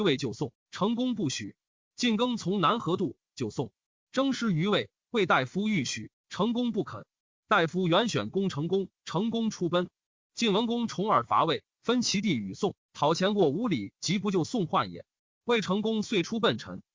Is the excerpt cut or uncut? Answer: uncut